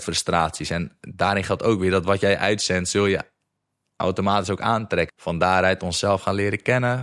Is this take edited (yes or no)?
yes